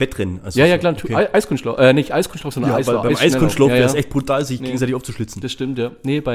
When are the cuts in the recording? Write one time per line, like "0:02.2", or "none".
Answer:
none